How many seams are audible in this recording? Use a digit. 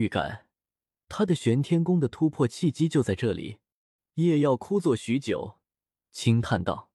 1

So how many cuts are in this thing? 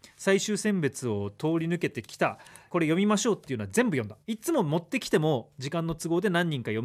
2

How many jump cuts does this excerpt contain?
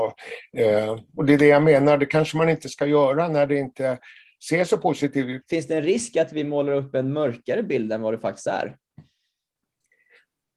1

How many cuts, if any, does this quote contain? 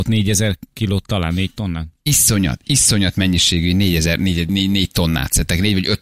1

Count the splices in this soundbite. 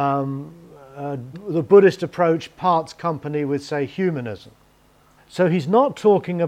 2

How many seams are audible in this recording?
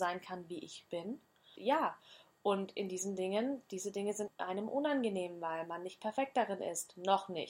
1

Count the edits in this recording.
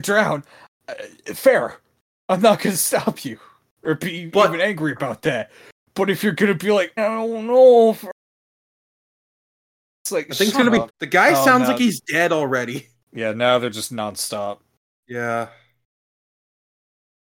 3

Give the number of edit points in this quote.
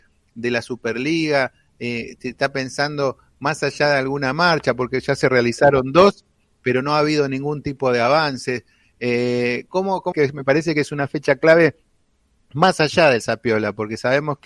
1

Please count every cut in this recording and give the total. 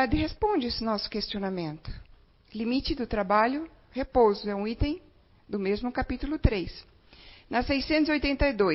0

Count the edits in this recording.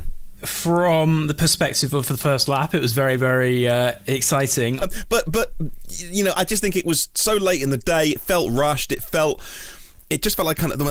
1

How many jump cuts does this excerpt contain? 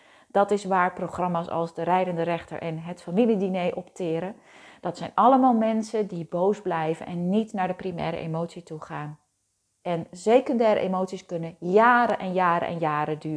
1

